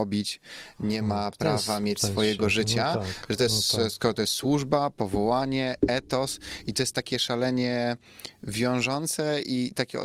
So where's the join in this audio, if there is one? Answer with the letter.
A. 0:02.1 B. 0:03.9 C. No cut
C